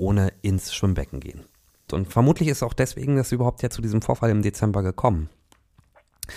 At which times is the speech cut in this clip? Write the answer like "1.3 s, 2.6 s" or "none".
1.9 s